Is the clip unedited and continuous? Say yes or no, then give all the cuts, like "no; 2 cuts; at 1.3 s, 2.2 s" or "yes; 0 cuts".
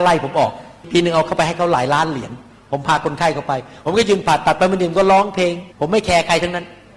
no; 1 cut; at 5.7 s